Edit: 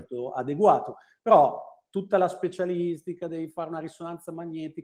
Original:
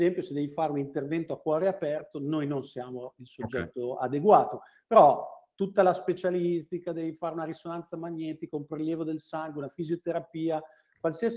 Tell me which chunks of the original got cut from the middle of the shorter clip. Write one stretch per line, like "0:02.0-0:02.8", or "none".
none